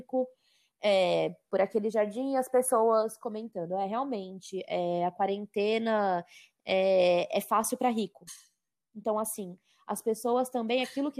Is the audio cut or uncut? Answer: uncut